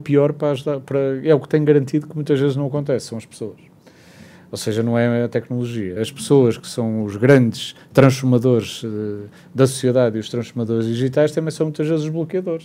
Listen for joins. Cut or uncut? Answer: cut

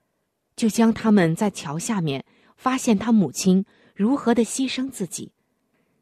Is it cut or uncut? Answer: uncut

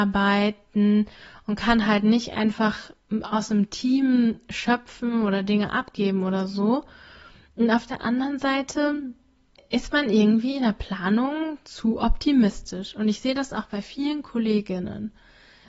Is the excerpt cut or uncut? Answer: uncut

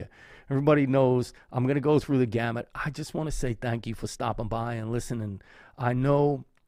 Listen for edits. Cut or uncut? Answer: uncut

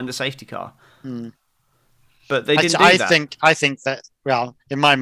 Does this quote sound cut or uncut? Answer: uncut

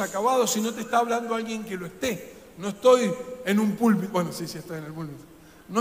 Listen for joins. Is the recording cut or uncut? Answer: uncut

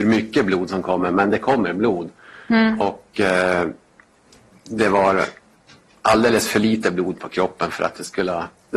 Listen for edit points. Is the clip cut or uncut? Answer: uncut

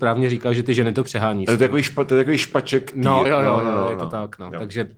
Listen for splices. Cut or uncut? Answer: cut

